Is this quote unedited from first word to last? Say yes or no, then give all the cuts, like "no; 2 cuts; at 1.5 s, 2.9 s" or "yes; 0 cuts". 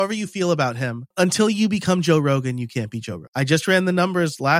no; 2 cuts; at 1.1 s, 3.3 s